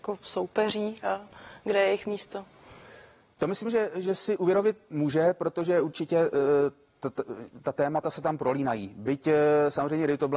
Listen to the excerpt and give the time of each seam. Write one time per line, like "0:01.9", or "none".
none